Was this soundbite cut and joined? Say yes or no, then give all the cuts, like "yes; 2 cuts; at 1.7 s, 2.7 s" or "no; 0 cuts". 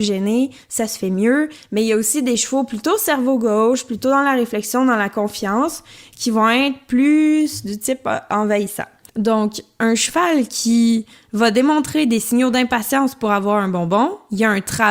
yes; 1 cut; at 9.1 s